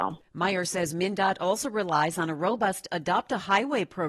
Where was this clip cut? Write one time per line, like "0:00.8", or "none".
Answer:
none